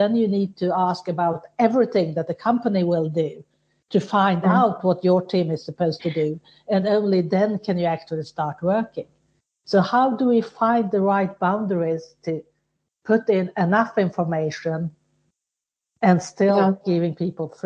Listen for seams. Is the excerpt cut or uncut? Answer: uncut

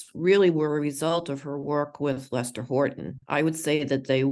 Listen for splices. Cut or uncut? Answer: cut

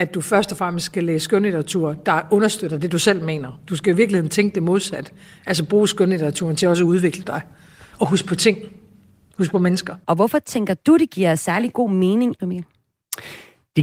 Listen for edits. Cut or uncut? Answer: cut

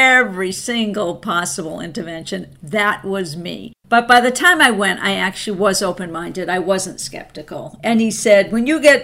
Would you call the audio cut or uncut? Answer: cut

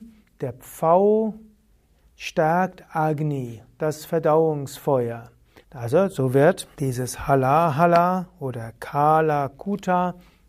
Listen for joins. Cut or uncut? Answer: cut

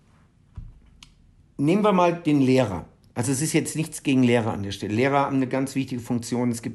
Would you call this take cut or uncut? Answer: uncut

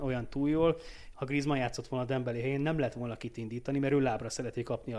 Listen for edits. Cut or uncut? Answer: cut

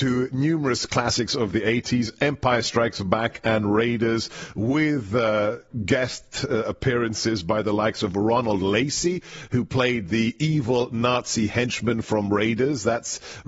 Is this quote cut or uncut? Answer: uncut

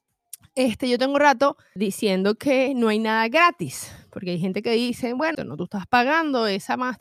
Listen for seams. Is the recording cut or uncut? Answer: cut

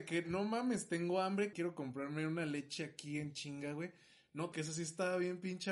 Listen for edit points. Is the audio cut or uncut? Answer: cut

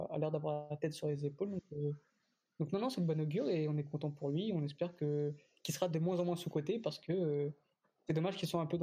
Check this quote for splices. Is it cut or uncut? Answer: uncut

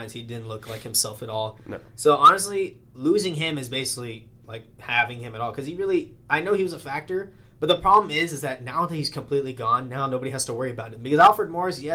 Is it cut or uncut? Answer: uncut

